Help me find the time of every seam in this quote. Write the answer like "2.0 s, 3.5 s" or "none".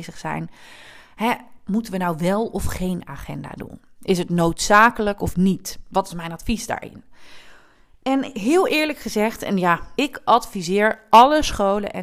10.0 s